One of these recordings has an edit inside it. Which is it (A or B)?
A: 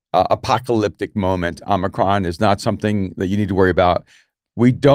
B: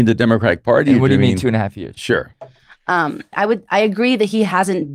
B